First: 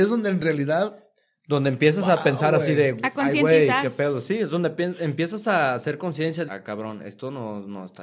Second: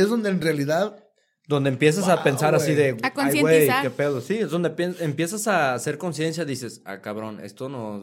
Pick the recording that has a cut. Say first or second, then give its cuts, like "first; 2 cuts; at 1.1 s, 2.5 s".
first; 1 cut; at 6.5 s